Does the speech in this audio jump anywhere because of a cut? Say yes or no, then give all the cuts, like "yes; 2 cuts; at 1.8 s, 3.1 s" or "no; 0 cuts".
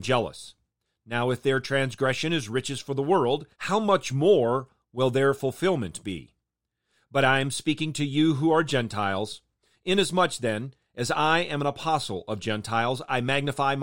yes; 1 cut; at 3.5 s